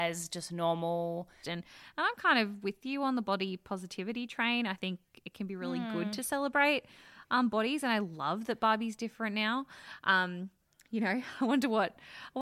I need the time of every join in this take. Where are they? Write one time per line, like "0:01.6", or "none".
0:01.4

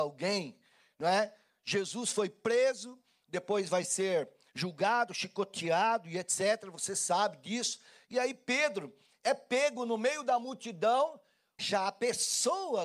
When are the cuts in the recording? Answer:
0:11.6

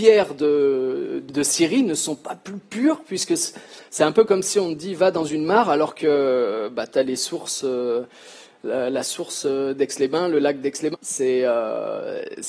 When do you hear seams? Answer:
0:01.3
0:10.9

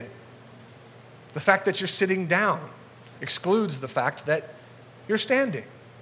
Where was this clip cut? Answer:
none

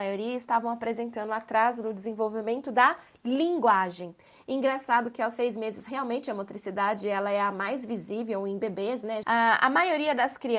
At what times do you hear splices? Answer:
0:09.2

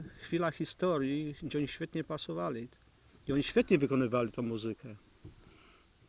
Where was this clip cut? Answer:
none

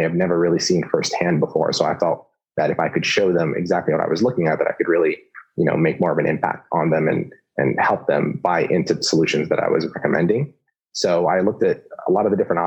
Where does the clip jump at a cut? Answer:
none

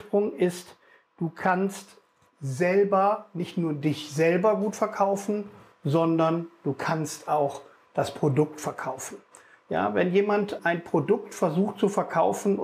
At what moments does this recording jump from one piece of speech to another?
0:10.6

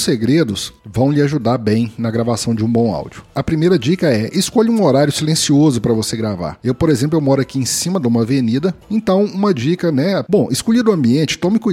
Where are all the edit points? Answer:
0:08.8
0:10.3

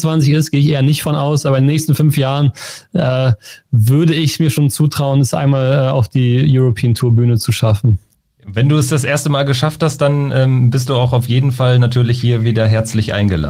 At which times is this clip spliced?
none

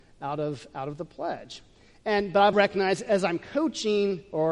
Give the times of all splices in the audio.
0:02.5

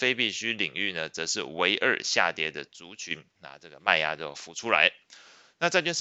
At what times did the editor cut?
0:03.3

